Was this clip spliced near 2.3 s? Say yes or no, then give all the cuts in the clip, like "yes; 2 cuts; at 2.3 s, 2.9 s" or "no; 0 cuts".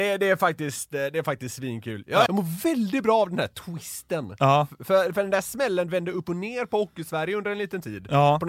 yes; 1 cut; at 2.3 s